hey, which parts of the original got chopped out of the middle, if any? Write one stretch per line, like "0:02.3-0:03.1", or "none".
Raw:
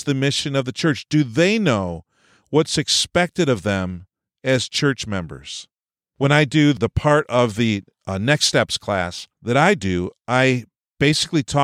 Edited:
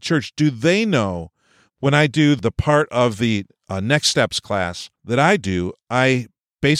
0:02.4-0:06.0